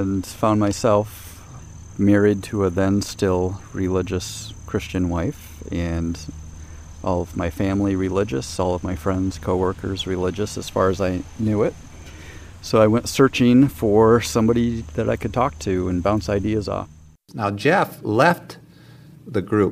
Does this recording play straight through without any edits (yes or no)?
yes